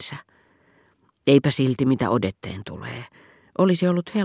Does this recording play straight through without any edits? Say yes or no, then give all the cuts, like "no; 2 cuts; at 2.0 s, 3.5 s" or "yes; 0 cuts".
yes; 0 cuts